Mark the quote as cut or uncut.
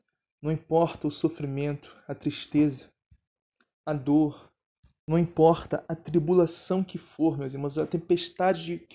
uncut